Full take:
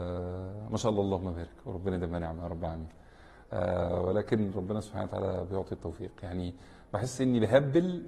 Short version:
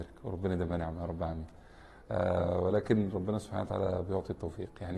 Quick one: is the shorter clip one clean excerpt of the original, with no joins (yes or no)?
yes